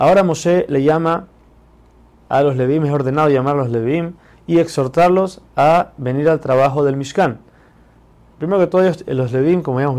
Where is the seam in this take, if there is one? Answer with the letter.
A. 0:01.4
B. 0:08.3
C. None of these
B